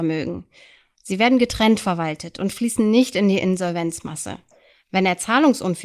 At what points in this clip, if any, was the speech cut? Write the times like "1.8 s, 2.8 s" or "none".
4.7 s